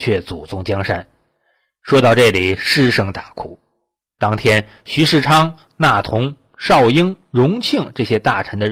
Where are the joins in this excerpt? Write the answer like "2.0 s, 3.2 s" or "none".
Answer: none